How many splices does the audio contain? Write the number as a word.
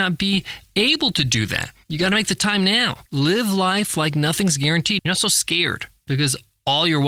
two